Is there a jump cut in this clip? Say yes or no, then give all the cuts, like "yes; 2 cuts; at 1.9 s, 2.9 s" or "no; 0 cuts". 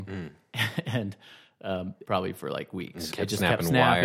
yes; 2 cuts; at 2.0 s, 3.1 s